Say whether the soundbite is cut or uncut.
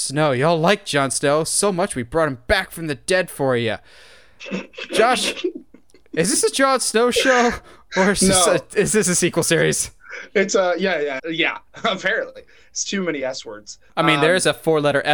cut